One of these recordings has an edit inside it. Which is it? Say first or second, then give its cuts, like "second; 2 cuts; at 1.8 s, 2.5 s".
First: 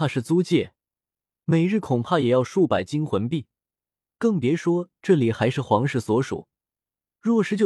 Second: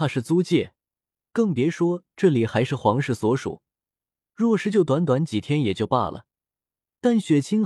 second; 1 cut; at 1.3 s